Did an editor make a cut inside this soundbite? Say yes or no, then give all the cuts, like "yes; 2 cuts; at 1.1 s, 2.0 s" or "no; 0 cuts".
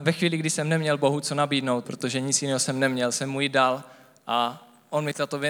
yes; 1 cut; at 1.8 s